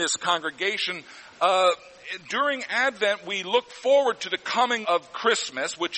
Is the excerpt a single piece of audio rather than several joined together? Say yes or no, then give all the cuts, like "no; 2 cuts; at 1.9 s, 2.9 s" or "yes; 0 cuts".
no; 1 cut; at 4.8 s